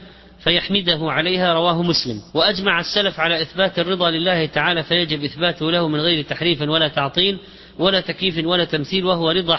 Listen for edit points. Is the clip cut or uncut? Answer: cut